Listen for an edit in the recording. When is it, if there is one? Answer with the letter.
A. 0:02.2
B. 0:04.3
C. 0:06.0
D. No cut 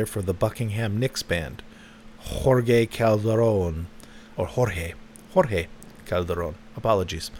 B